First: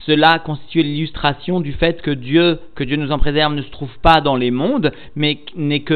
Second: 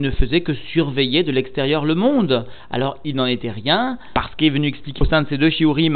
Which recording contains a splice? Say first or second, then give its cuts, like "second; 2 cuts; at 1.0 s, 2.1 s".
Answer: second; 1 cut; at 5.0 s